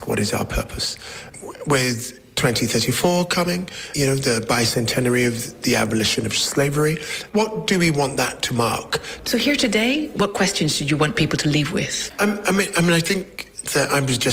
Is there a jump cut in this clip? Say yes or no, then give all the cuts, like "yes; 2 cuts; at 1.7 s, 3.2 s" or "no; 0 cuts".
yes; 1 cut; at 9.2 s